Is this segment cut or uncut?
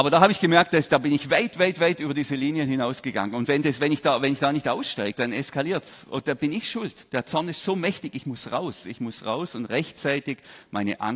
cut